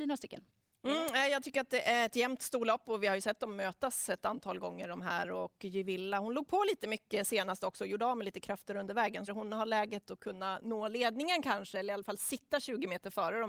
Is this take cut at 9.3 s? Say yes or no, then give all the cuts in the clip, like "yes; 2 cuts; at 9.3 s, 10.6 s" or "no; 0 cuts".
yes; 1 cut; at 9.3 s